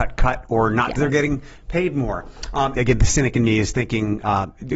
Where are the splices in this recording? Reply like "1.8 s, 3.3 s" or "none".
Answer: 1.0 s, 2.7 s